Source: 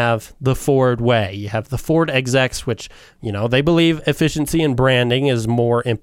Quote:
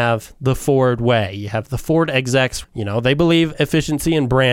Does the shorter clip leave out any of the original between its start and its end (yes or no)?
yes